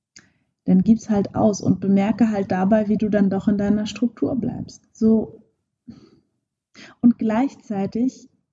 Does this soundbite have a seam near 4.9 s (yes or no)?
yes